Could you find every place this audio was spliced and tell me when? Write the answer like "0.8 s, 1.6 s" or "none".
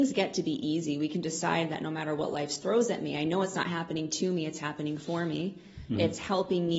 none